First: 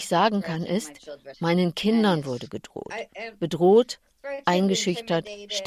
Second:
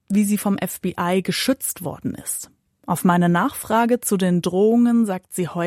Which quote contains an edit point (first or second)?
first